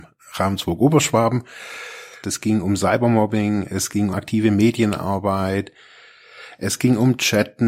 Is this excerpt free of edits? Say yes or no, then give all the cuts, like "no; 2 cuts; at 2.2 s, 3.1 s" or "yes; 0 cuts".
no; 2 cuts; at 2.2 s, 4.1 s